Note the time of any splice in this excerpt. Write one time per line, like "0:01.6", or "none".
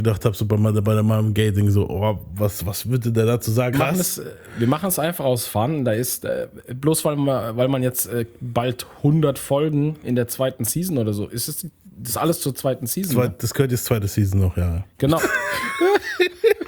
0:03.7
0:15.2